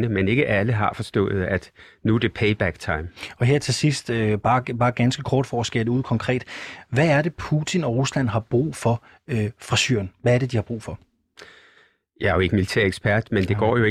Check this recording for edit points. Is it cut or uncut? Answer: uncut